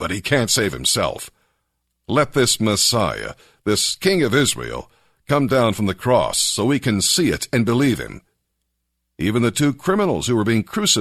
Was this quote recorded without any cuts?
yes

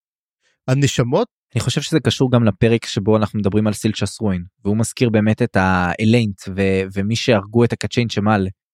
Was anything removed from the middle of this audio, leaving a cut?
yes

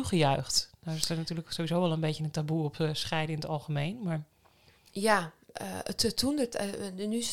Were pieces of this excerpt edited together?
no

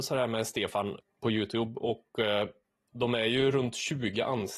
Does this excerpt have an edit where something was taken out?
no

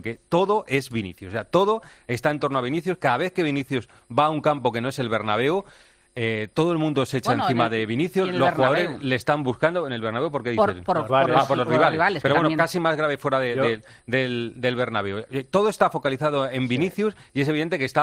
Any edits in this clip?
yes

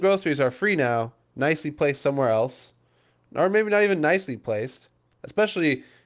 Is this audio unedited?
yes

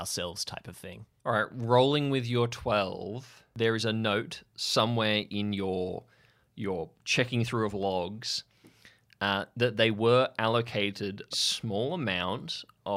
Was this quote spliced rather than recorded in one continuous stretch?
yes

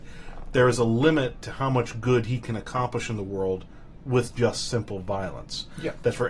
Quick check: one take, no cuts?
yes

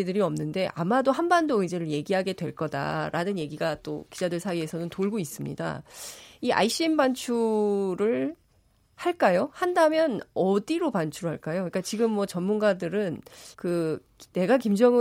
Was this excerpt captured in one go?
no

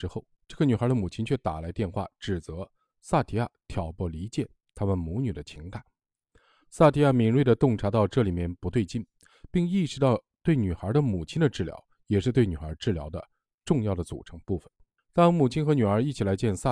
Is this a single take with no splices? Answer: no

